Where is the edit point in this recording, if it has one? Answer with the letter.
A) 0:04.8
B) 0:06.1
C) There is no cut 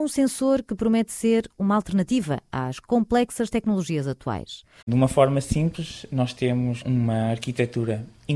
A